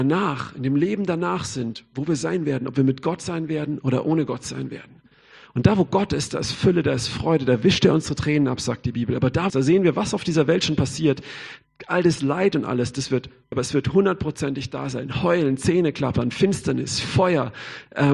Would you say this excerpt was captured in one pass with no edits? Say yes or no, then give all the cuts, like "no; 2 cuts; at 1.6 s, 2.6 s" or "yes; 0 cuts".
no; 2 cuts; at 9.5 s, 13.5 s